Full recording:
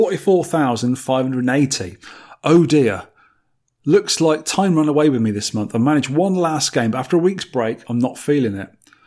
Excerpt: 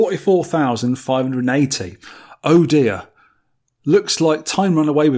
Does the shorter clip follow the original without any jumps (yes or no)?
yes